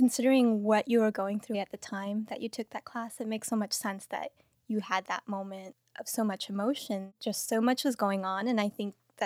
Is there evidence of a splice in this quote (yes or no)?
yes